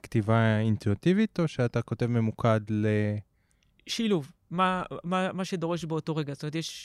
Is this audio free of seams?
yes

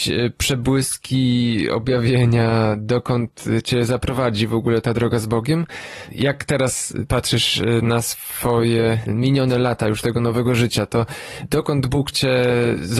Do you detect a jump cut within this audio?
no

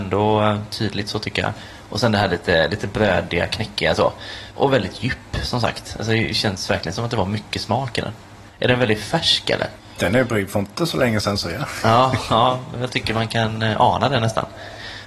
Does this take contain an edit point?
no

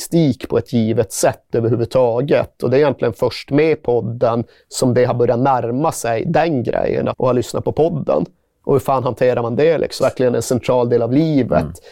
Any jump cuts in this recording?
yes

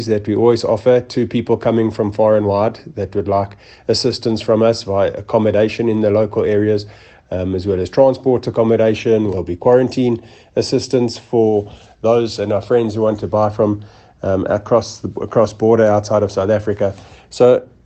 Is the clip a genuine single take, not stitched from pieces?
no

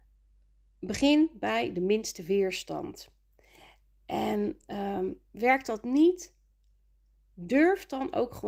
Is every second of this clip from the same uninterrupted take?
yes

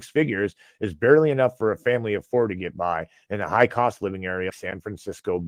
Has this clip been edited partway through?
yes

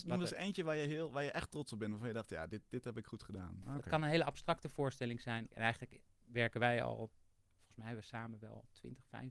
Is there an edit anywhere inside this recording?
yes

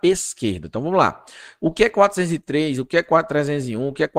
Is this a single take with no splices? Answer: yes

